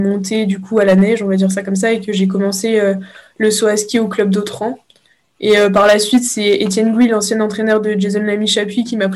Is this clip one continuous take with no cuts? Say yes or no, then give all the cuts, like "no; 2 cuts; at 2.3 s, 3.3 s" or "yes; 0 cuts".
yes; 0 cuts